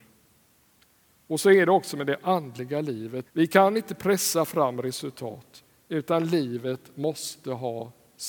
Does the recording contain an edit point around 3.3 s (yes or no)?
yes